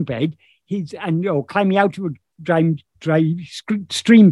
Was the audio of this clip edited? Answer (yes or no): no